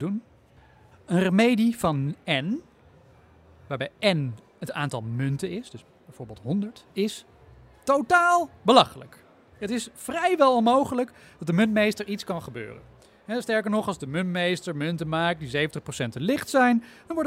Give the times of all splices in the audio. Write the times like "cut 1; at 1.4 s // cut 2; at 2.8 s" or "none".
cut 1; at 0.9 s